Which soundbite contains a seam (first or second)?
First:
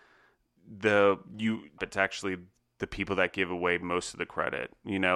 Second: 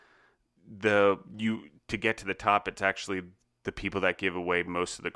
first